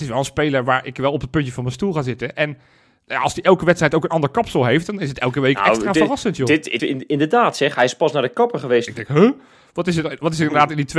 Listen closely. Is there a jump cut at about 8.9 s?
yes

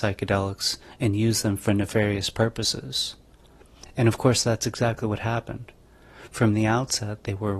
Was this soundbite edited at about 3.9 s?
no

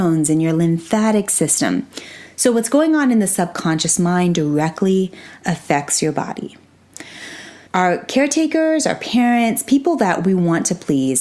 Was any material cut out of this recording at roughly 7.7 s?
yes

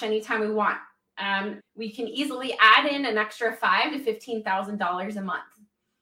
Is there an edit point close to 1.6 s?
yes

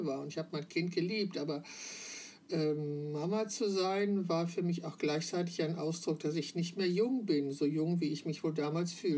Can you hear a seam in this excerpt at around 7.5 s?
no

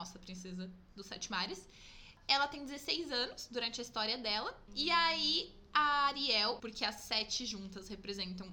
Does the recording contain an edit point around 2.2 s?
no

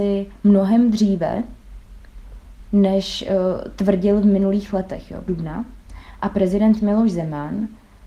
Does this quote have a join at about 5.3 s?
yes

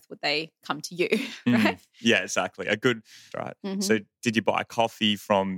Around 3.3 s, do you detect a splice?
yes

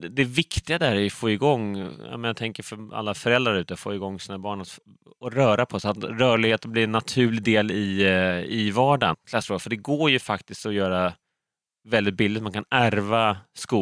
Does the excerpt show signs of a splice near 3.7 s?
no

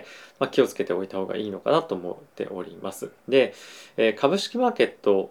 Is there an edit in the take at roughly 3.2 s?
yes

